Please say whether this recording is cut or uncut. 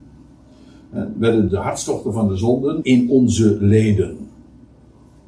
cut